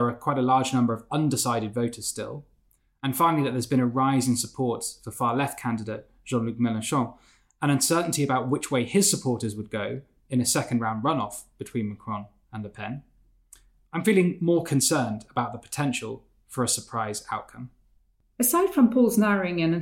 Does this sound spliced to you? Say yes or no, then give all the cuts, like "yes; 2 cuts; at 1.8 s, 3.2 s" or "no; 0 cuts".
no; 0 cuts